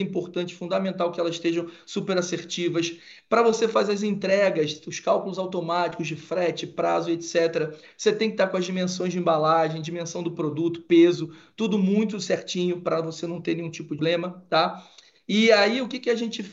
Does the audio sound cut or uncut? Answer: cut